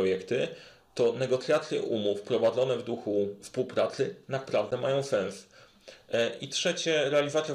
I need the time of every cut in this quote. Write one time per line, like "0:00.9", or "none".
none